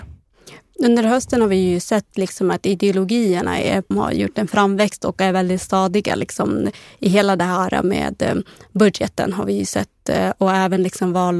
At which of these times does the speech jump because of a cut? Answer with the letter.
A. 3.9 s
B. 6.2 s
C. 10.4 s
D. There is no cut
A